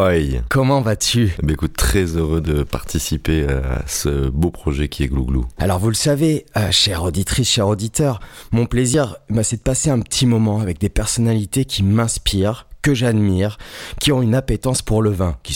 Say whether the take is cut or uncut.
cut